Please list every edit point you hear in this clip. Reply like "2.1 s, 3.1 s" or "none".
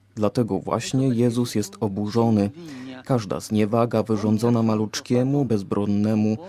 5.5 s